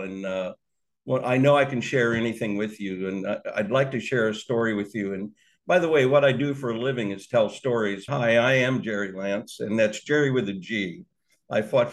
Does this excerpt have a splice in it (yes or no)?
yes